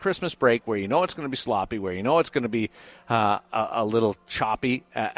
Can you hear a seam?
no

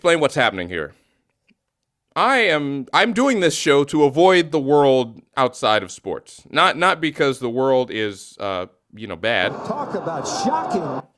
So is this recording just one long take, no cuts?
yes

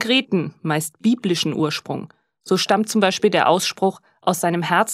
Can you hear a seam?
no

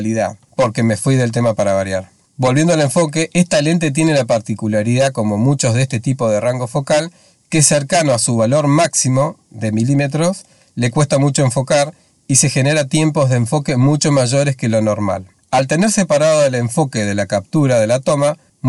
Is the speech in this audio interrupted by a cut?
no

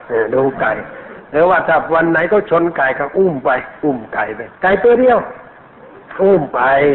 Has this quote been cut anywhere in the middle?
yes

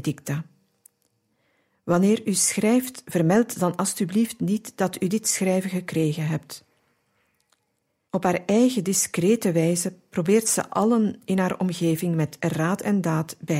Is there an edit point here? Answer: yes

